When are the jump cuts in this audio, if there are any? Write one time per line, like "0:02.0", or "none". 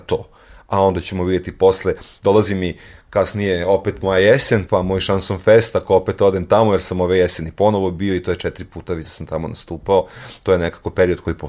0:04.7